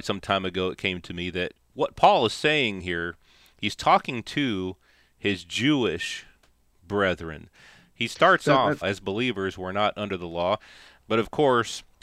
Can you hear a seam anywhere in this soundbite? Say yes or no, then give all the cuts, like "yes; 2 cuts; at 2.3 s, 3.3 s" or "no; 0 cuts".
yes; 1 cut; at 8.8 s